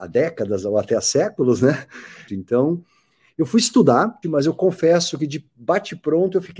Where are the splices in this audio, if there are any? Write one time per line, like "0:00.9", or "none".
0:02.3
0:04.2